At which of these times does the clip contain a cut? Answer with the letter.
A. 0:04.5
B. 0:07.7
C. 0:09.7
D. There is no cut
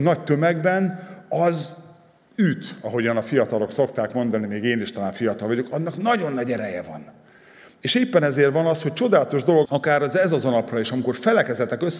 C